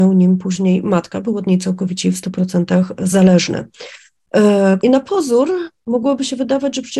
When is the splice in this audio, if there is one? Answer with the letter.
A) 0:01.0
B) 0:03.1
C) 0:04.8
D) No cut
C